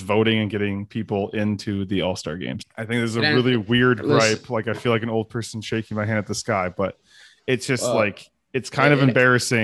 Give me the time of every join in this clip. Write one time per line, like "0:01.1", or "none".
0:02.6